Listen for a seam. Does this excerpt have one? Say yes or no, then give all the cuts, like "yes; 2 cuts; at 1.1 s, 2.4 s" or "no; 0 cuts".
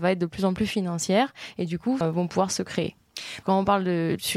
yes; 2 cuts; at 2.0 s, 3.4 s